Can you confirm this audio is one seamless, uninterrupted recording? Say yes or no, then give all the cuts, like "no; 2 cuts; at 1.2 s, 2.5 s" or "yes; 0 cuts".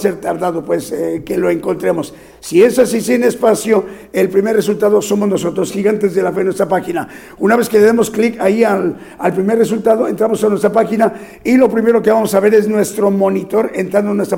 yes; 0 cuts